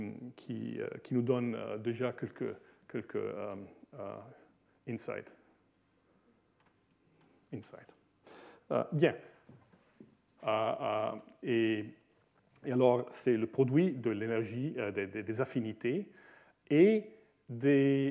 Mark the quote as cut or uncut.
cut